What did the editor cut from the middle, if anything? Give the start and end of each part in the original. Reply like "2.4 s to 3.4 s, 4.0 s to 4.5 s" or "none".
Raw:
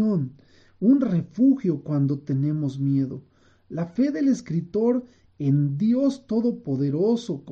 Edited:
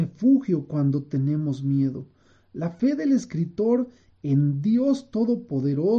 none